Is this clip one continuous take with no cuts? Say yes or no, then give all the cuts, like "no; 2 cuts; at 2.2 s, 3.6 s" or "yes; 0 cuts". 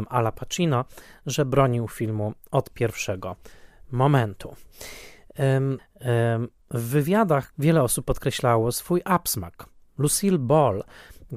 no; 2 cuts; at 5.8 s, 7.5 s